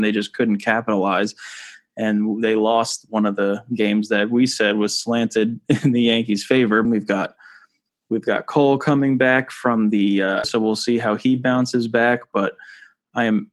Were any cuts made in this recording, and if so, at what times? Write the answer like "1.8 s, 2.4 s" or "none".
6.8 s, 10.4 s